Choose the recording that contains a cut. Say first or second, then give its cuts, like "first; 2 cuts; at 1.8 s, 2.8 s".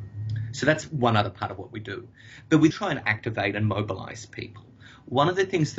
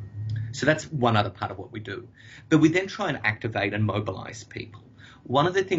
first; 1 cut; at 2.7 s